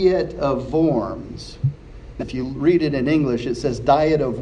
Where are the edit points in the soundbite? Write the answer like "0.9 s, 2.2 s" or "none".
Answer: 2.2 s